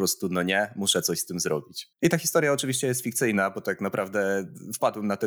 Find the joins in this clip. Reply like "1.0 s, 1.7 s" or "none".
1.9 s